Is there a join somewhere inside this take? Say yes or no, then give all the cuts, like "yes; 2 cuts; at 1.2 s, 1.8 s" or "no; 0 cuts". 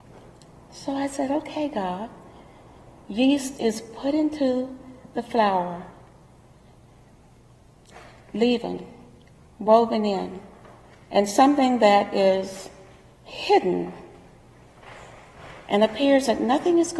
no; 0 cuts